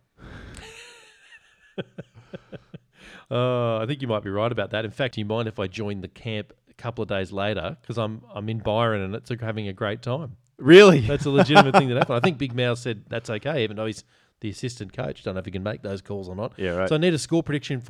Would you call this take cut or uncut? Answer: cut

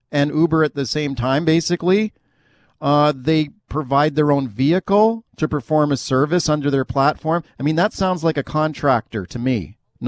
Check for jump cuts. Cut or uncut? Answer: uncut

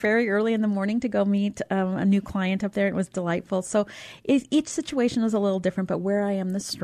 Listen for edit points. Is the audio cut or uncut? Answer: uncut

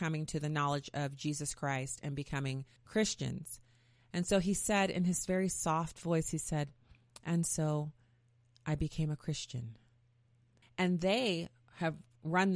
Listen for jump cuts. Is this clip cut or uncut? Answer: cut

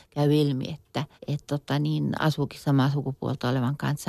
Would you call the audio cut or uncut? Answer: cut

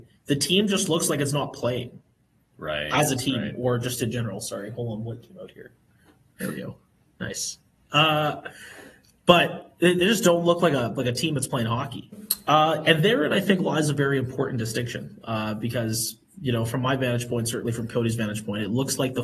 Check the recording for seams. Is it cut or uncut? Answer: uncut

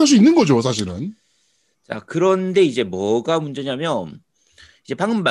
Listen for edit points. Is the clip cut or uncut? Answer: uncut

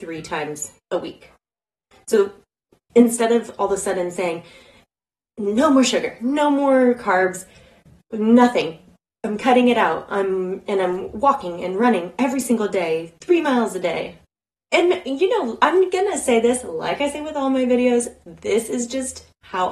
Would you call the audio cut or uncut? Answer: uncut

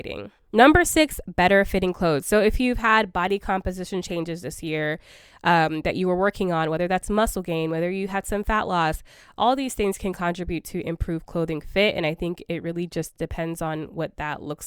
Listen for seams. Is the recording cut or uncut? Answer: uncut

